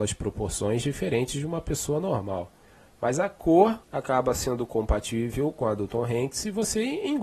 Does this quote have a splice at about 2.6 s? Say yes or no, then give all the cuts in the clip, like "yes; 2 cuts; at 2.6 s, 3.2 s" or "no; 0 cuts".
no; 1 cut; at 3.8 s